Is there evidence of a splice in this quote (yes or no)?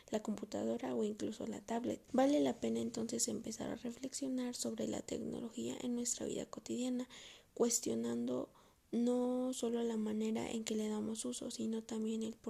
yes